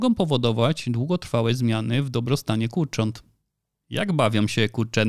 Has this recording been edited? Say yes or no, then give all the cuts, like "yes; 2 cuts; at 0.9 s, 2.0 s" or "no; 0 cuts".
no; 0 cuts